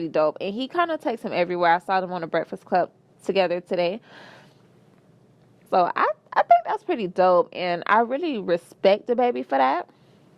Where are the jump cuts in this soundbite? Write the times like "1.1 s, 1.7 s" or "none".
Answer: 5.7 s